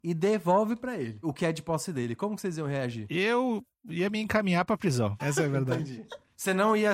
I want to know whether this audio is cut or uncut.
cut